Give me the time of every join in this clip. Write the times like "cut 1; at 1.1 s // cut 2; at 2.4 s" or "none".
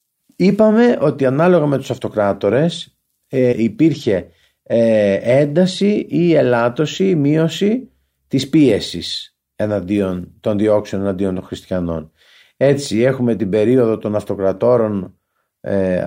cut 1; at 3.5 s